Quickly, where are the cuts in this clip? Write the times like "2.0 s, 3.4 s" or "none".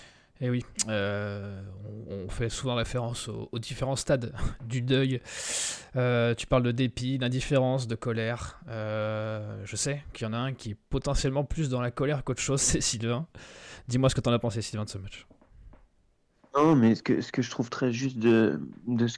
none